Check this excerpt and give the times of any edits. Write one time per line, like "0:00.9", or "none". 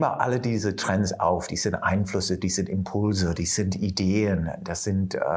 none

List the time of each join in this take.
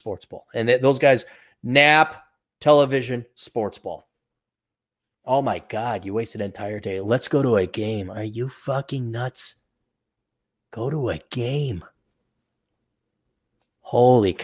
none

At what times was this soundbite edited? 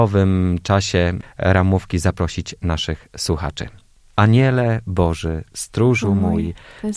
none

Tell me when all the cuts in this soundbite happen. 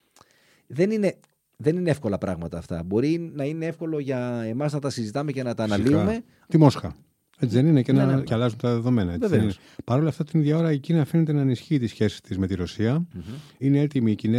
0:06.5
0:08.3

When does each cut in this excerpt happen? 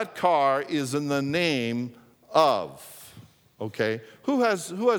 none

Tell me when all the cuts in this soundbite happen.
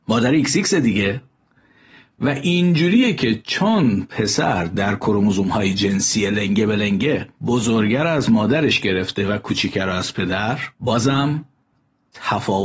0:07.3
0:10.7

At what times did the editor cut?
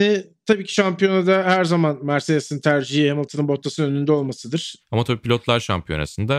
0:04.8

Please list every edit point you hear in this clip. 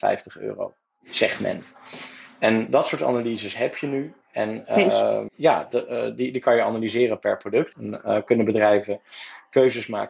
0:05.3
0:07.7

